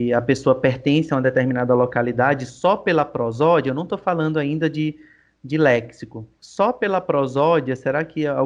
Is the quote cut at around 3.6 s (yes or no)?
no